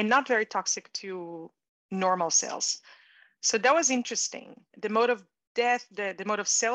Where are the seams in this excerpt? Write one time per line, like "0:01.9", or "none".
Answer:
none